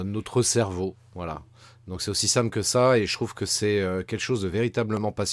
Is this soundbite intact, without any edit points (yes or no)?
yes